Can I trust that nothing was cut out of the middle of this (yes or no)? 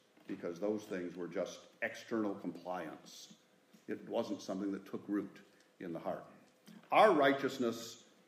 yes